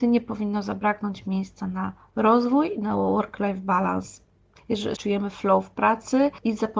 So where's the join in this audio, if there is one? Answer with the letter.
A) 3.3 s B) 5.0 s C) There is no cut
B